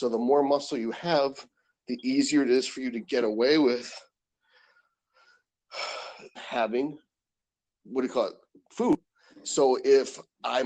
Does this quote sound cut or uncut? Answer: cut